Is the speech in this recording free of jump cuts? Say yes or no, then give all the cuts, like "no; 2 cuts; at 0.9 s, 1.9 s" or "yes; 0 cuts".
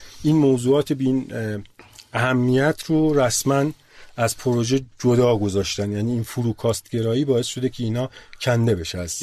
yes; 0 cuts